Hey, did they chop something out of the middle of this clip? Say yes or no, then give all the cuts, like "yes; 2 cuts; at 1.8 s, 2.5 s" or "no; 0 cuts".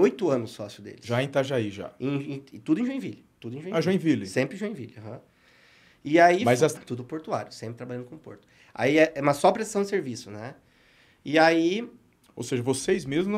yes; 2 cuts; at 3.3 s, 6.8 s